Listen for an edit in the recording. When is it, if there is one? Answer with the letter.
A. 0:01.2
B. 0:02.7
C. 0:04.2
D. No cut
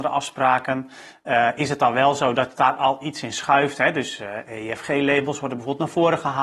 D